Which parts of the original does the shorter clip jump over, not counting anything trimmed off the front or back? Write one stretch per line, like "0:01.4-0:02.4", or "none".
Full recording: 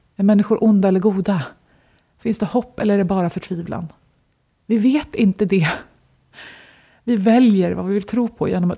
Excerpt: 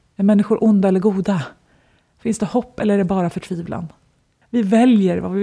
0:04.4-0:07.0

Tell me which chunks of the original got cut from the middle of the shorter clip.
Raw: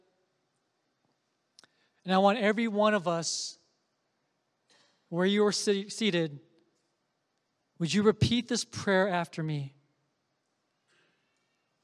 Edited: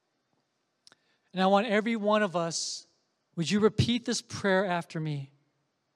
0:04.0-0:07.7

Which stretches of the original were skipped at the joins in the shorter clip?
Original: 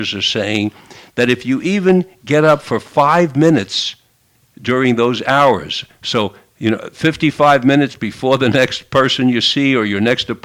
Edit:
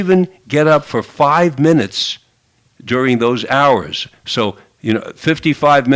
none

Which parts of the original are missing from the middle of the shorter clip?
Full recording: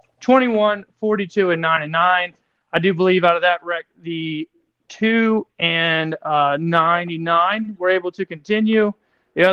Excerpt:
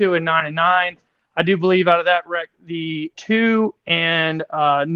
0:04.5-0:04.8

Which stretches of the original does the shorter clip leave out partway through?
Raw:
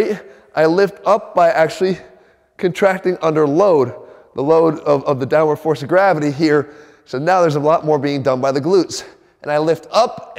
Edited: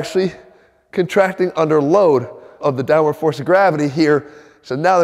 0:04.3-0:05.0

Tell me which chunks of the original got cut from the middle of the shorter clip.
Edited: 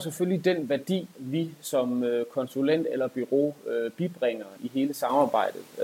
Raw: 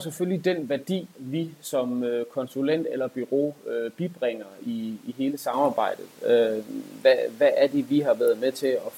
0:04.6-0:05.0

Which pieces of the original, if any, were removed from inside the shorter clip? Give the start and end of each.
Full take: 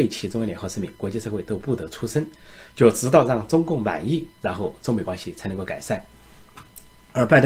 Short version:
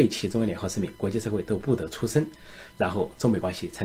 0:02.7-0:04.4

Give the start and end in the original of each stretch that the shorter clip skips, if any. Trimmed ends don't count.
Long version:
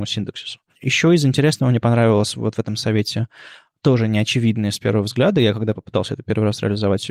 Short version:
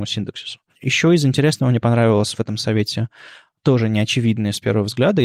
0:02.3-0:02.5

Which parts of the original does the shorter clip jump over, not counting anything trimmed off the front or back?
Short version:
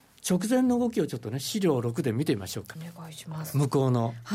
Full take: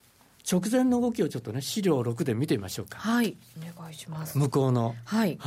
0:02.9-0:03.5

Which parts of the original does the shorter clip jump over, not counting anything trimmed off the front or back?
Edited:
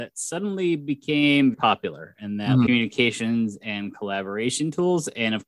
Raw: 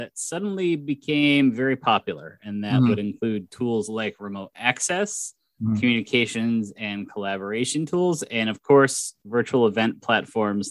0:01.5-0:01.8
0:02.9-0:05.8

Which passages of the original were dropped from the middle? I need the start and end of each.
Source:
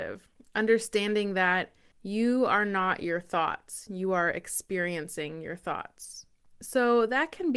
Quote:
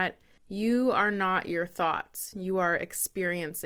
none

